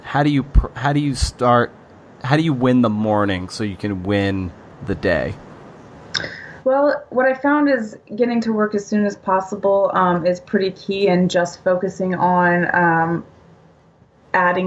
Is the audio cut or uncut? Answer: uncut